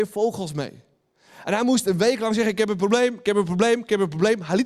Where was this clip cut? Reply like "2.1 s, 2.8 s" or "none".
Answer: none